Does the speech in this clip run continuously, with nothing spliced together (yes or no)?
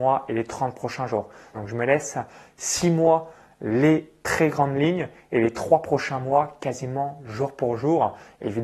no